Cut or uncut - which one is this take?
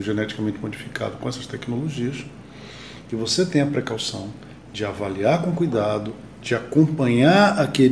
uncut